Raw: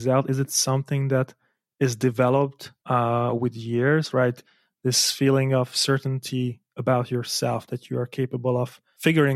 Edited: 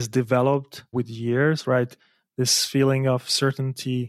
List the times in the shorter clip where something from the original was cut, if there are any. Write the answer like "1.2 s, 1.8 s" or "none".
0.9 s